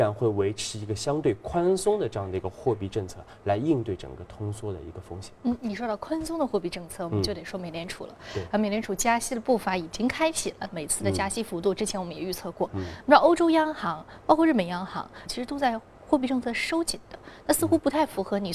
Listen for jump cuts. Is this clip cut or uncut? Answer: cut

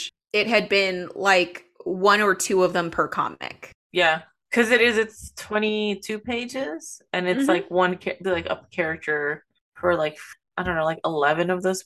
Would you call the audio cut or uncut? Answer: cut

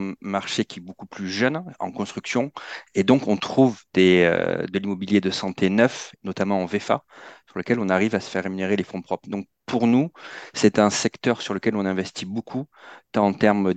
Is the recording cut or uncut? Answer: uncut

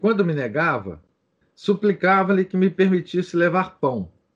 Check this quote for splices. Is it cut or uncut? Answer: cut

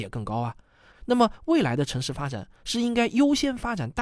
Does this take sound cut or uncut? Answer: cut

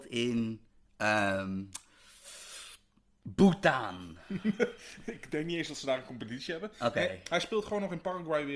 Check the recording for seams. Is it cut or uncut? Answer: uncut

